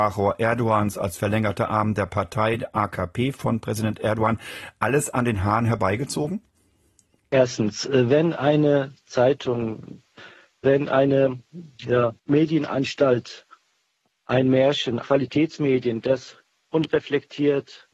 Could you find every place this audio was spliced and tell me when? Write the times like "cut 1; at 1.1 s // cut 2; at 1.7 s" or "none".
cut 1; at 12.2 s // cut 2; at 15.0 s